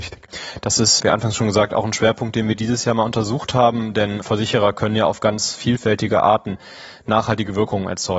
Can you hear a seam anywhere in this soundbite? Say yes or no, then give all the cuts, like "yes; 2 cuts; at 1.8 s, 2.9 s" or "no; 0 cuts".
no; 0 cuts